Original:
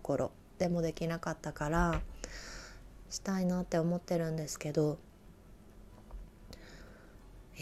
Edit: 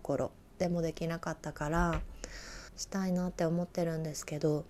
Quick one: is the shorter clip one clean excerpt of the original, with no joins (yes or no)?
no